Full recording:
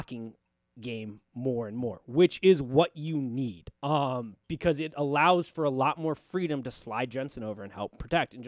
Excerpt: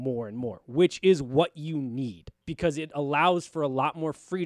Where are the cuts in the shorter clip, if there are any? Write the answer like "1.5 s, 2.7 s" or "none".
2.4 s